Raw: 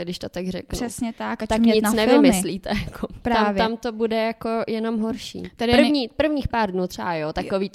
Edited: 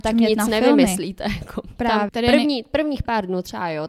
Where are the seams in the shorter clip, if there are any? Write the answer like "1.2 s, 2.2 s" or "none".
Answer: 2.1 s